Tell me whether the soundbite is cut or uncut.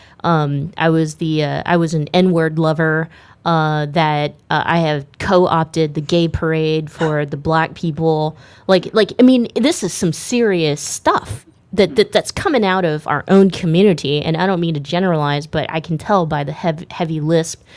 uncut